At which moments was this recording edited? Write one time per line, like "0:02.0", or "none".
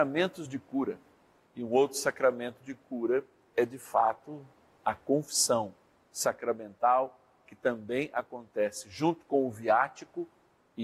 0:01.5